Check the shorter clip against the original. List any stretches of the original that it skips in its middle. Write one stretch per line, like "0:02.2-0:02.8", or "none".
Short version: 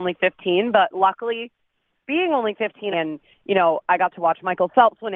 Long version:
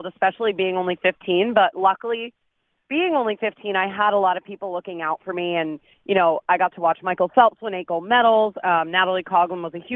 0:03.7-0:05.5